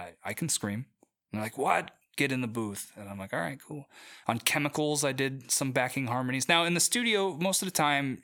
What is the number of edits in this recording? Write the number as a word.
one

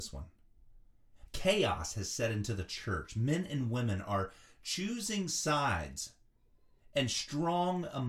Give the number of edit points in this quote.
one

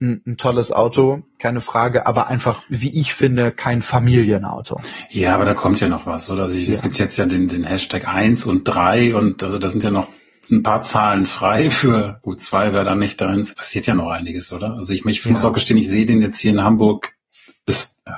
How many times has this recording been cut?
one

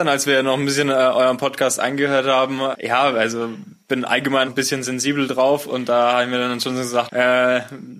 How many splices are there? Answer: three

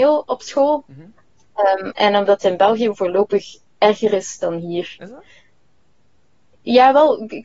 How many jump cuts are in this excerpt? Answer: one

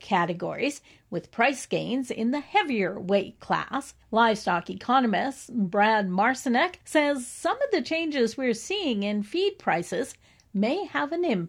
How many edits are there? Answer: two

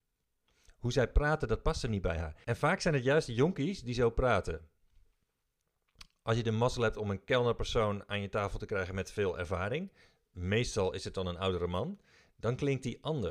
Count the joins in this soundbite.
one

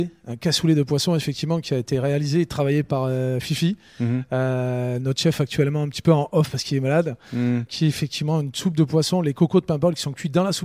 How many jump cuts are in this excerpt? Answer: zero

